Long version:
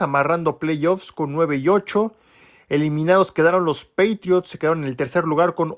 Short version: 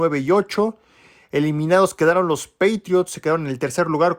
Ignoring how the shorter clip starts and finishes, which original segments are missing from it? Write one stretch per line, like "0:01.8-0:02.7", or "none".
none